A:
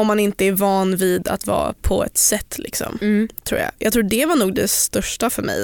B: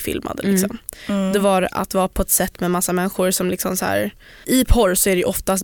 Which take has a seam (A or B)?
B